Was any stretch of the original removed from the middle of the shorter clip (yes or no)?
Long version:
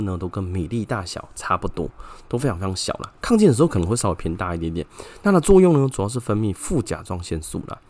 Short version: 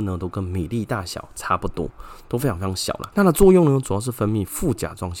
yes